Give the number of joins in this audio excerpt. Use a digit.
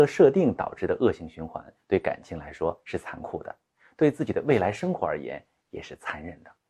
0